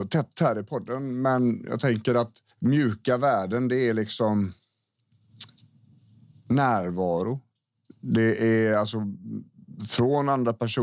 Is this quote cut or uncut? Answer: cut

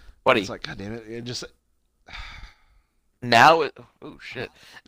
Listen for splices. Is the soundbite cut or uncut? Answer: uncut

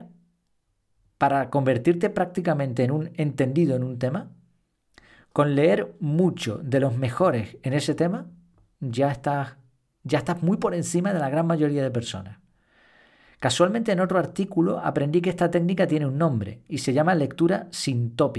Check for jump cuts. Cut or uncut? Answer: uncut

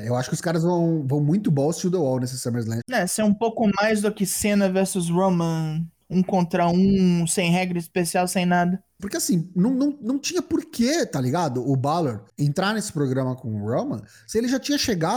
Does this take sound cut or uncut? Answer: cut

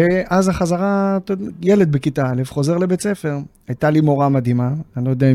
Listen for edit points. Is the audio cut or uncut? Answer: uncut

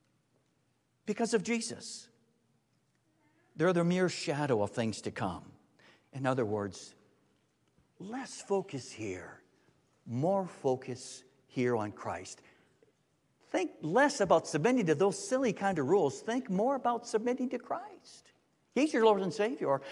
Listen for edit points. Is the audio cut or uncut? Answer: uncut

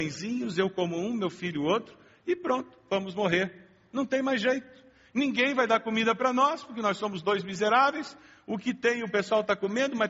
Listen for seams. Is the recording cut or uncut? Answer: uncut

